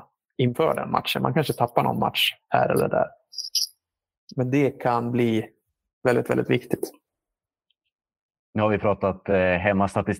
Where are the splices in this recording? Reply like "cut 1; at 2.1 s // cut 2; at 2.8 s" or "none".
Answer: none